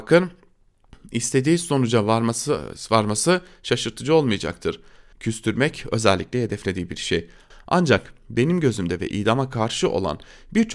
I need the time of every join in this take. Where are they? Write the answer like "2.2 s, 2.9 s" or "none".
5.1 s, 7.5 s